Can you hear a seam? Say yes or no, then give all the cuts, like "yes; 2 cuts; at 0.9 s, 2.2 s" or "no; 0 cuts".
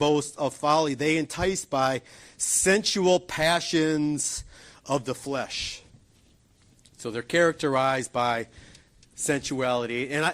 no; 0 cuts